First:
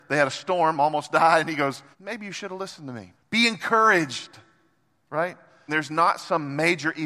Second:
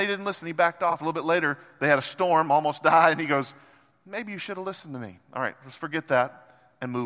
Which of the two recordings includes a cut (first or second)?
first